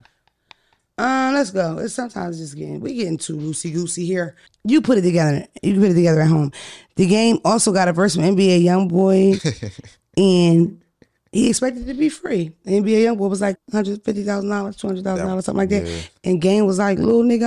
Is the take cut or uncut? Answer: cut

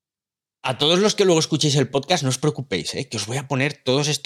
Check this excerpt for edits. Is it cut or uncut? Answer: uncut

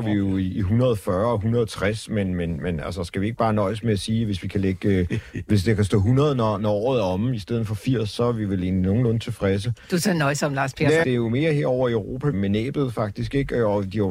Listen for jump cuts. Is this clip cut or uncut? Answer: cut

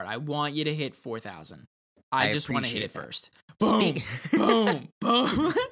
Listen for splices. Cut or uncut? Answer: uncut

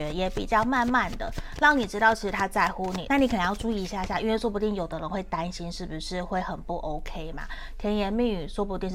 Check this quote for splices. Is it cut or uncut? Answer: cut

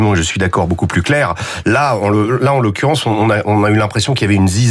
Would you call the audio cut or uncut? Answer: uncut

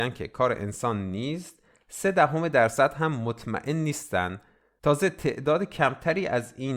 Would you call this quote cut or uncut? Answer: uncut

